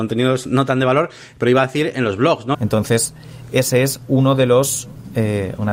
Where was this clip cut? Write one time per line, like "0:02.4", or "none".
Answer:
0:02.5

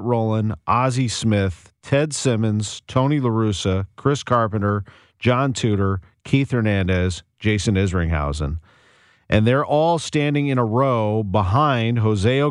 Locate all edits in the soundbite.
none

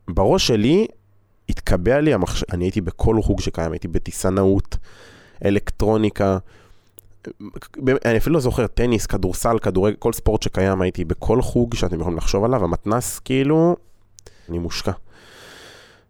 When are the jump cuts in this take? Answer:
0:02.5
0:14.5

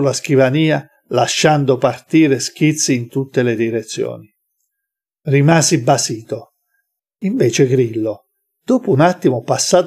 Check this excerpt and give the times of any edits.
0:07.0

